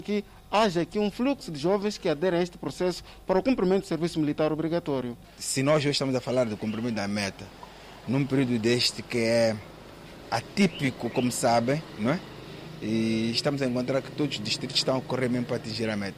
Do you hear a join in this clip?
no; 0 cuts

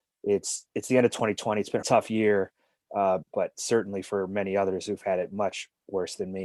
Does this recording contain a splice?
yes; 2 cuts; at 1.8 s, 3.2 s

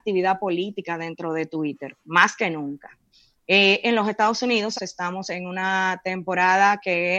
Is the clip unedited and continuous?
no; 1 cut; at 4.7 s

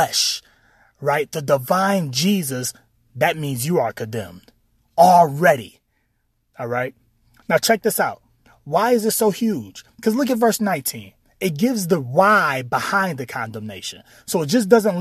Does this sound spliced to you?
no; 0 cuts

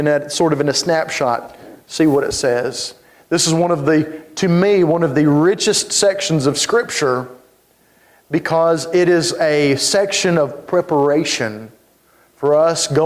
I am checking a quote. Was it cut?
no; 0 cuts

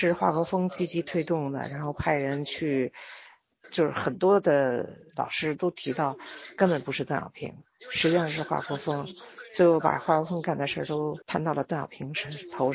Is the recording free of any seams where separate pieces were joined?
no; 2 cuts; at 3.6 s, 11.2 s

